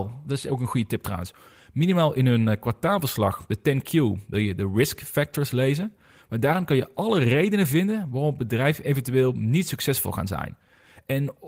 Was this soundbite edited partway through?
no; 0 cuts

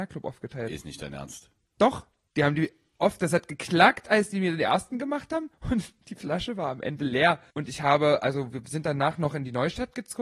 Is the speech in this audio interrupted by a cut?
no; 0 cuts

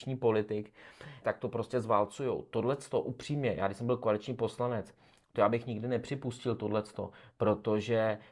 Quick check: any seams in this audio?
yes; 1 cut; at 1.2 s

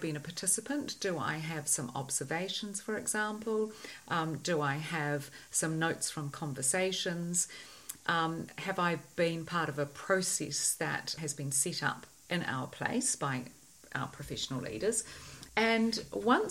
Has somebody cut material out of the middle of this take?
no; 0 cuts

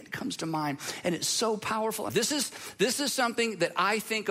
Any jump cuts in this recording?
yes; 1 cut; at 2.1 s

